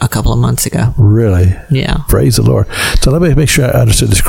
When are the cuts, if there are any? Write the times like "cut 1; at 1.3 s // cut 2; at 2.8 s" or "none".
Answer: none